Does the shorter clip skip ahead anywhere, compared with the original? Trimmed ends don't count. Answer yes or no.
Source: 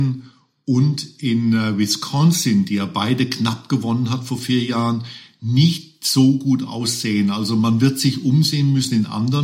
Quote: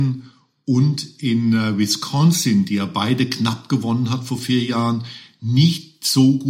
no